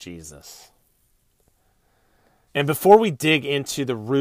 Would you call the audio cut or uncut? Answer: cut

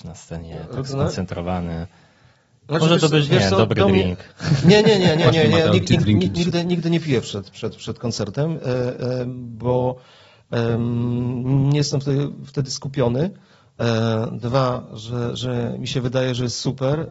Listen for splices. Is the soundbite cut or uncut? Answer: uncut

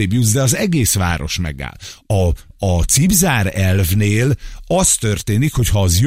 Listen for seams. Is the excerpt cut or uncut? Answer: uncut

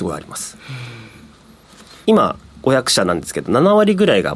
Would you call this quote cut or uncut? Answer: cut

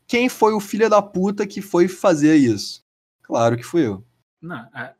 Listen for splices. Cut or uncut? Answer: uncut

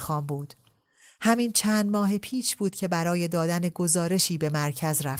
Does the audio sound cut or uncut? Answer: uncut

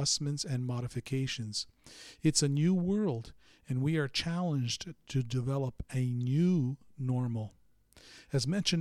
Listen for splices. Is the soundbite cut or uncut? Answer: uncut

